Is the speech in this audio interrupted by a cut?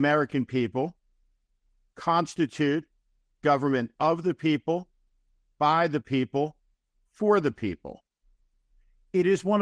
no; 0 cuts

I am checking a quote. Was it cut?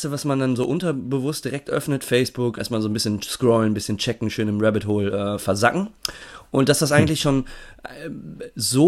yes; 1 cut; at 2.6 s

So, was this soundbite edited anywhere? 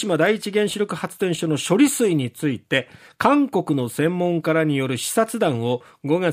no; 0 cuts

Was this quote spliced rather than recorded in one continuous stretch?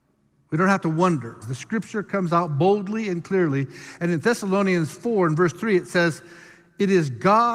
yes; 1 cut; at 1.4 s

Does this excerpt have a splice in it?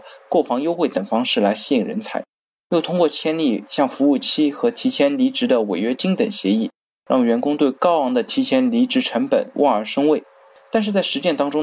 no; 0 cuts

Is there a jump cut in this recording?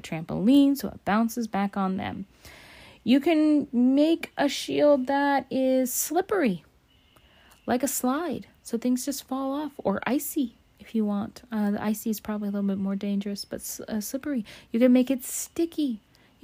no; 0 cuts

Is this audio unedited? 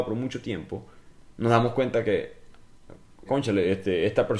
no; 1 cut; at 3.3 s

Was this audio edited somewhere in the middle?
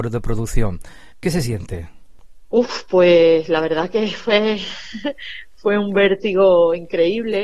no; 0 cuts

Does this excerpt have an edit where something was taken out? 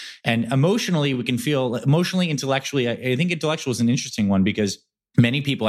no; 0 cuts

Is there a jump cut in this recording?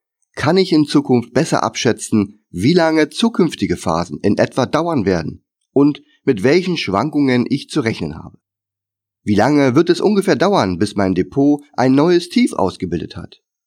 no; 0 cuts

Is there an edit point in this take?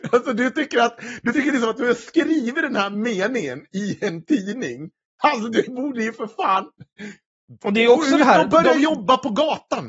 no; 0 cuts

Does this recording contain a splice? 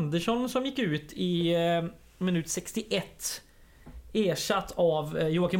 no; 0 cuts

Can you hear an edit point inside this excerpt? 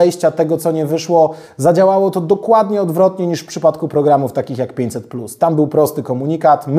no; 0 cuts

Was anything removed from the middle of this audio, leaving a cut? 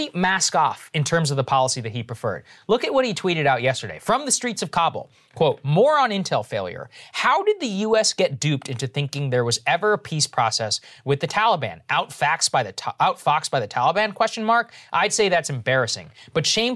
no; 0 cuts

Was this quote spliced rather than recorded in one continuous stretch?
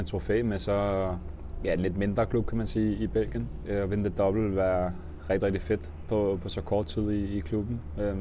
yes; 1 cut; at 3.6 s

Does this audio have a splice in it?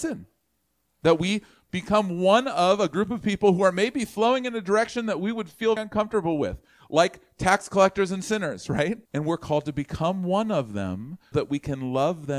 yes; 3 cuts; at 5.8 s, 9.1 s, 11.3 s

